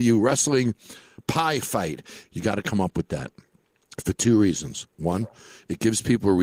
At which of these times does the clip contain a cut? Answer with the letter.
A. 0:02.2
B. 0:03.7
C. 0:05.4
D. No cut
A